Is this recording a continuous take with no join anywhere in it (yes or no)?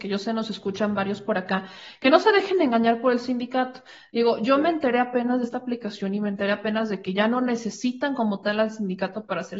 yes